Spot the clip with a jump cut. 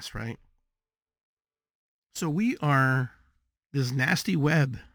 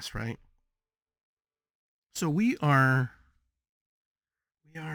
first; 1 cut; at 3.5 s

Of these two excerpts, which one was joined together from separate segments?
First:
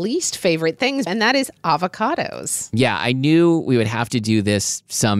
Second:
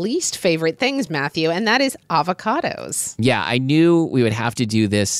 first; 1 cut; at 1.1 s

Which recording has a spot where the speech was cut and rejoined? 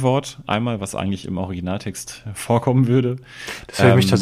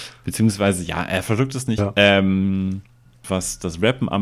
second; 2 cuts; at 1.8 s, 3.2 s

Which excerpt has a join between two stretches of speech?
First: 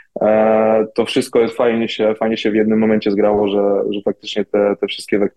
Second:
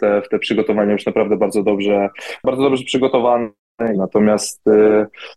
second; 1 cut; at 3.9 s

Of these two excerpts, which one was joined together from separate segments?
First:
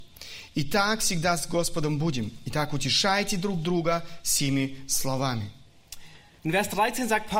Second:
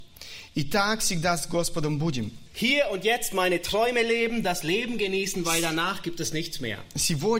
second; 2 cuts; at 2.5 s, 4.4 s

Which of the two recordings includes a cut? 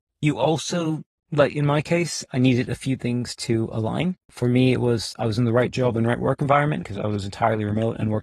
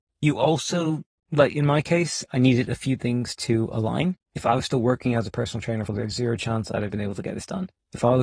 second; 2 cuts; at 4.2 s, 5.9 s

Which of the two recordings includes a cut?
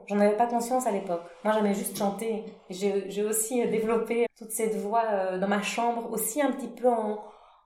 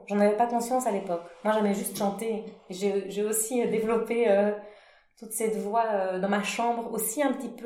first; 1 cut; at 4.2 s

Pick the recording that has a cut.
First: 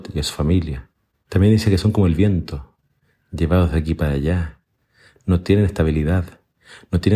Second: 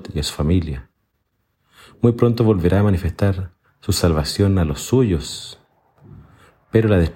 first; 1 cut; at 1.3 s

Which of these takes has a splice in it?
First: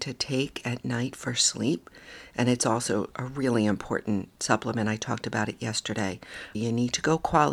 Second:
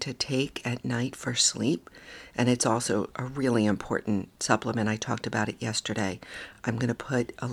first; 1 cut; at 6.5 s

